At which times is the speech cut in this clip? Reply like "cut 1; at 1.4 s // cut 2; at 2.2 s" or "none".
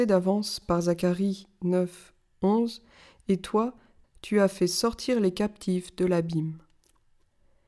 cut 1; at 4.0 s